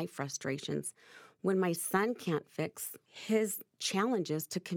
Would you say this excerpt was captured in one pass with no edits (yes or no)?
yes